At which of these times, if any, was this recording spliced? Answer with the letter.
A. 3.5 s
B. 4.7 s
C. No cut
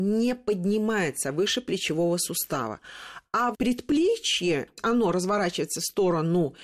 A